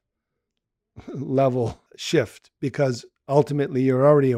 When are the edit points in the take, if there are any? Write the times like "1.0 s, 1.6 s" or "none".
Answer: 1.9 s